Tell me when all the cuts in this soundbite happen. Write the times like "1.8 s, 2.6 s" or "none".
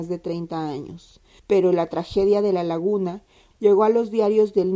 1.4 s, 3.5 s